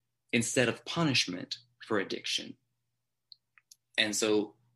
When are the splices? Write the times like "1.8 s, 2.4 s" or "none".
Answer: none